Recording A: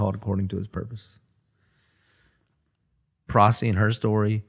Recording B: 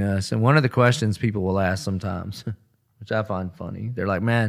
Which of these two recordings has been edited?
A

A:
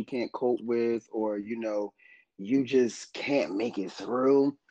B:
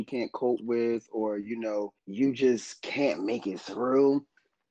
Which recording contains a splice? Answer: B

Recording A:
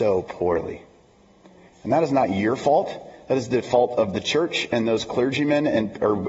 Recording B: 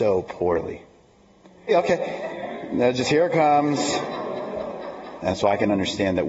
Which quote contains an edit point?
B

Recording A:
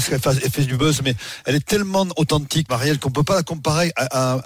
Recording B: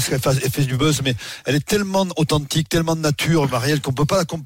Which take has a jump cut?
A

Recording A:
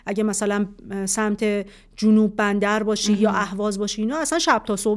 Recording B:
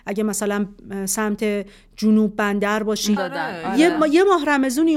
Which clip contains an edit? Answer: B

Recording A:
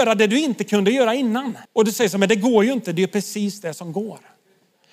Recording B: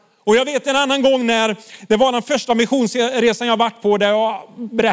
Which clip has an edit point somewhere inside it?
A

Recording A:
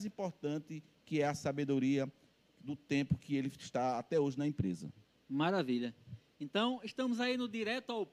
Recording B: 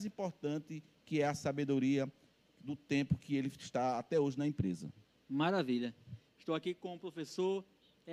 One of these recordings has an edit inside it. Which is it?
B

